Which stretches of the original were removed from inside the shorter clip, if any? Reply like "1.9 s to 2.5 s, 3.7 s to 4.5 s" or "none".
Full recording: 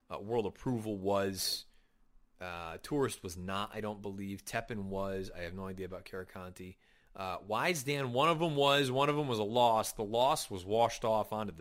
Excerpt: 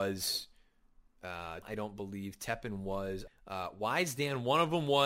2.8 s to 3.7 s, 5.3 s to 7.0 s